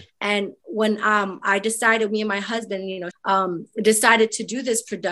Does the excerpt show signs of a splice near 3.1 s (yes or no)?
yes